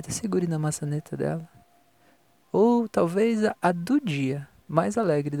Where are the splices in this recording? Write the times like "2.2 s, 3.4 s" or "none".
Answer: 2.4 s